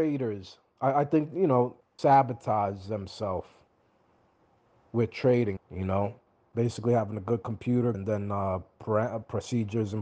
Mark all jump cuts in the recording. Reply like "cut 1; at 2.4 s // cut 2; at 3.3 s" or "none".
cut 1; at 1.8 s // cut 2; at 5.6 s // cut 3; at 7.9 s